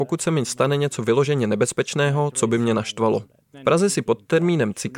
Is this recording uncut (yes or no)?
no